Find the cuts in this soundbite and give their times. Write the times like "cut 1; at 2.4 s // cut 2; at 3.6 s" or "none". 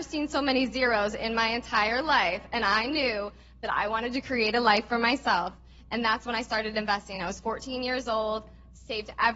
none